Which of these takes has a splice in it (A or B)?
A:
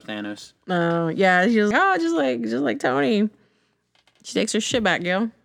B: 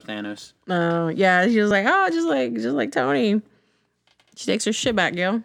A